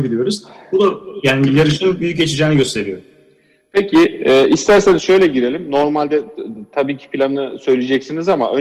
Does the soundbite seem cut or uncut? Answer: uncut